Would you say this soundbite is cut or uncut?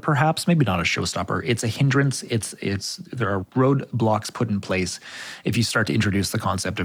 uncut